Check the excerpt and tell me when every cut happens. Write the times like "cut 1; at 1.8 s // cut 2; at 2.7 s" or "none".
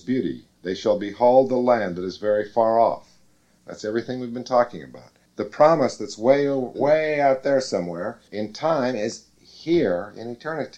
cut 1; at 5.3 s // cut 2; at 8.3 s

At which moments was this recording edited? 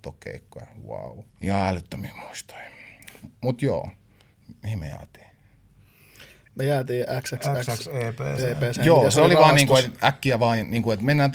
cut 1; at 1.3 s

